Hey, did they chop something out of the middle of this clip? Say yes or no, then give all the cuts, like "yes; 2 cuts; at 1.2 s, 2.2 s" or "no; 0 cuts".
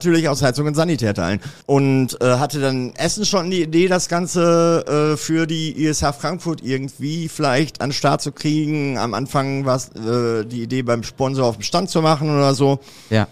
yes; 1 cut; at 1.6 s